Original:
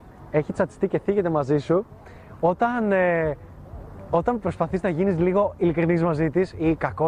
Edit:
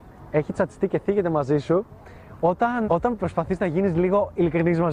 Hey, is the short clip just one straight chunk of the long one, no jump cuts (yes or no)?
no